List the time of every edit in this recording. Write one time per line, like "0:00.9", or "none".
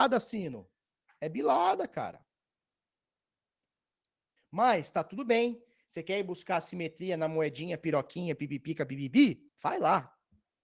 0:04.4
0:09.5